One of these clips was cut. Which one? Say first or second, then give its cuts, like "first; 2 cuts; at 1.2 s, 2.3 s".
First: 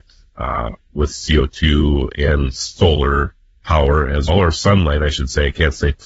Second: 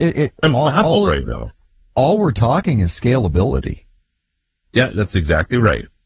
first; 1 cut; at 4.3 s